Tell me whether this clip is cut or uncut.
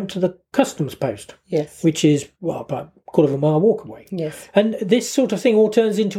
uncut